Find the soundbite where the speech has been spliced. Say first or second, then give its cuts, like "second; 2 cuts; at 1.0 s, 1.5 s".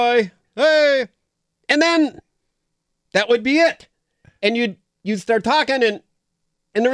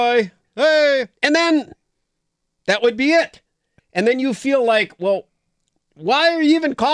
second; 2 cuts; at 1.2 s, 3.8 s